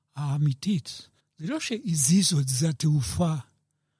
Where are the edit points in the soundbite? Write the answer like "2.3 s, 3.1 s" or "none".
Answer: 1.2 s

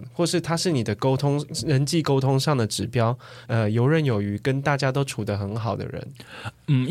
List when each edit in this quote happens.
3.4 s

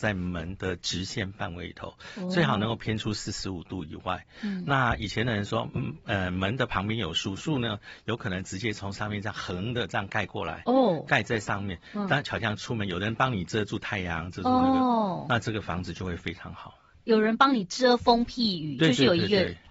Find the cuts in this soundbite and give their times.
none

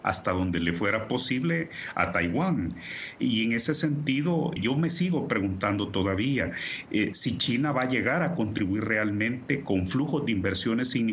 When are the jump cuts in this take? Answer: 3.2 s, 4.6 s

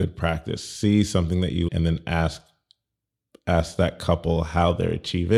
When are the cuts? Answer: 1.7 s

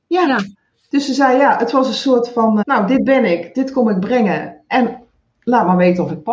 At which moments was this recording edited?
2.6 s

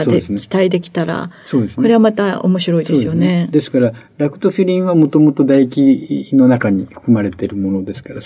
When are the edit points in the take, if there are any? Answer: none

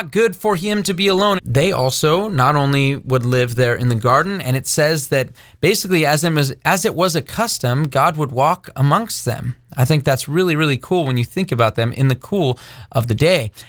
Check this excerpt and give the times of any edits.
1.4 s

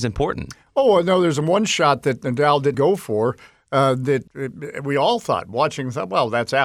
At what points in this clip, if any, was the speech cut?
2.7 s

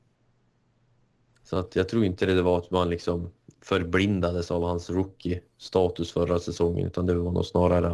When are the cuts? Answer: none

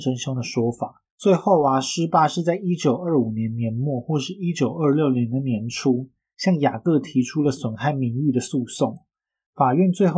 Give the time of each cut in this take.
1.1 s

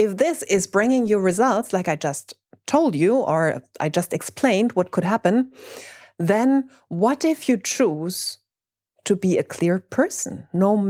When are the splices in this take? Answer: none

